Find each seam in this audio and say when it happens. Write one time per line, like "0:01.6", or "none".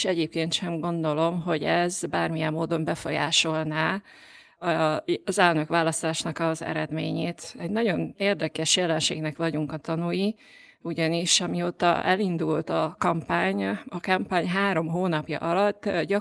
none